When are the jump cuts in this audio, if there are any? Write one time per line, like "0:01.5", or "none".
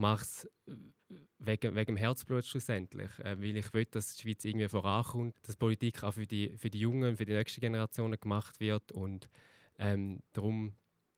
0:05.3